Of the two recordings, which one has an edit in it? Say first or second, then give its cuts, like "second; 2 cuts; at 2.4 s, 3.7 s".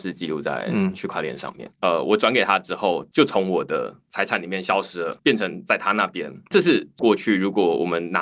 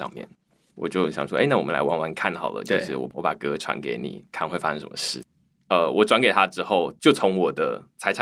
first; 1 cut; at 1.7 s